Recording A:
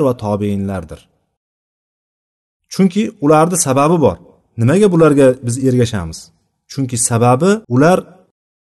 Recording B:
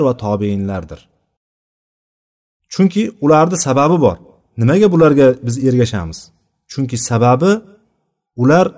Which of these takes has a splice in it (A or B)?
A